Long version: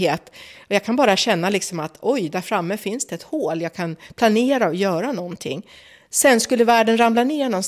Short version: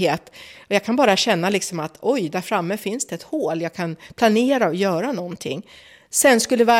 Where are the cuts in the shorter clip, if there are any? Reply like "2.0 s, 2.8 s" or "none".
none